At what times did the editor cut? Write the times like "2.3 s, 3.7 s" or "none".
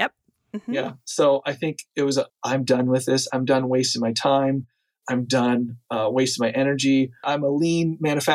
2.3 s, 7.2 s